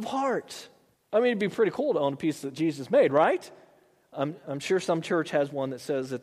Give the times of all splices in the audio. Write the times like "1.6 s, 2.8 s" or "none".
0.9 s

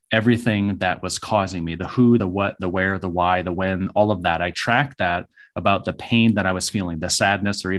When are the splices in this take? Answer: none

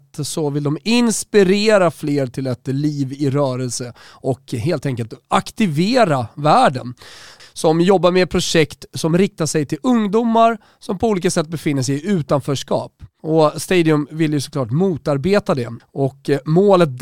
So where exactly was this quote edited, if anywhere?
7.4 s, 15.8 s

